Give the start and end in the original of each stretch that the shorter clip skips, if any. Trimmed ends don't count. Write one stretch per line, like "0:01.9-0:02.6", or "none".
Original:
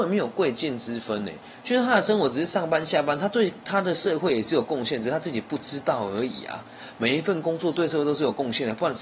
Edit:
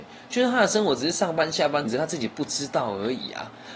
0:03.2-0:05.0